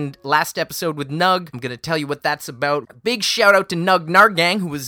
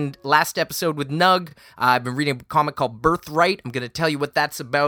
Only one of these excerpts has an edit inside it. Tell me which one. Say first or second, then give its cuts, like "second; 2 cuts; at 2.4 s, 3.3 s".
first; 2 cuts; at 1.5 s, 2.8 s